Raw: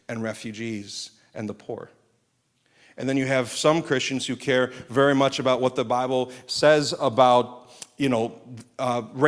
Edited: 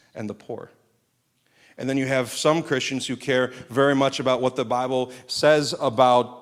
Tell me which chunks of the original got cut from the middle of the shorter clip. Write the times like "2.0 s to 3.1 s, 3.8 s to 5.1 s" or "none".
none

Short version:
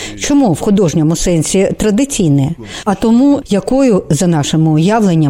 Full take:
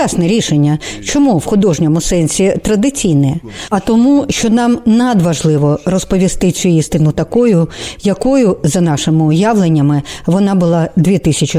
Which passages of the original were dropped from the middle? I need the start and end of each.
4.3 s to 8.0 s

